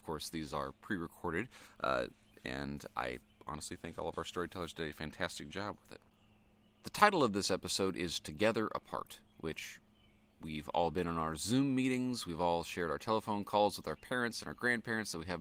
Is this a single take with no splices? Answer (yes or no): yes